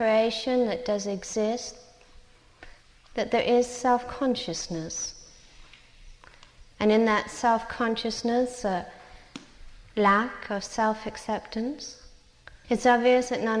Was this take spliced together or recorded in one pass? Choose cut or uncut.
cut